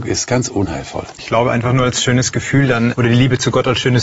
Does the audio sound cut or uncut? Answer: cut